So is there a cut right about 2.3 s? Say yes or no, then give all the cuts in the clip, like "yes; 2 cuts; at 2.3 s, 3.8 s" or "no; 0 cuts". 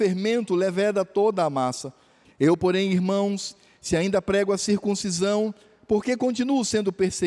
yes; 1 cut; at 2.3 s